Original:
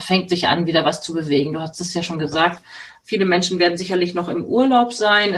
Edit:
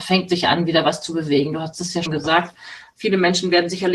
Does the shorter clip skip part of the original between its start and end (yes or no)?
yes